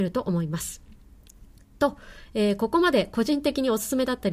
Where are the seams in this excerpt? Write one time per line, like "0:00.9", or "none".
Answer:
none

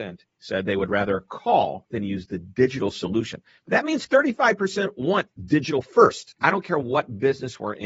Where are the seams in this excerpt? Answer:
0:06.4

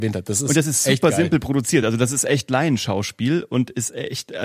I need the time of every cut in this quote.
none

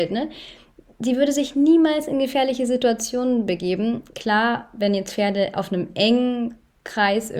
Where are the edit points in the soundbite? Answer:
none

